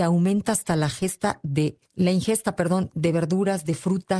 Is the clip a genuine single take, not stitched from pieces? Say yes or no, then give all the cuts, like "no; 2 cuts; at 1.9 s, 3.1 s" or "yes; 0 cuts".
no; 1 cut; at 1.8 s